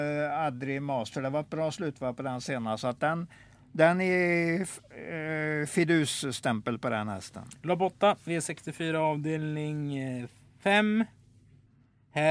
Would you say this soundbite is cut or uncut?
uncut